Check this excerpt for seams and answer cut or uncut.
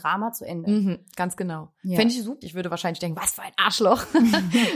cut